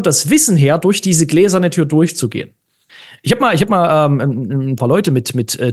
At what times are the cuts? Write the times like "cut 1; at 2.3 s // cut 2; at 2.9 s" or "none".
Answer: cut 1; at 4.8 s

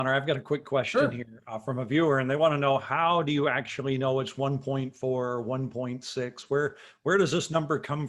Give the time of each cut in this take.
none

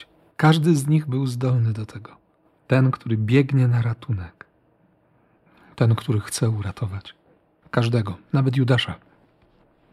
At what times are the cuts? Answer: cut 1; at 2.6 s

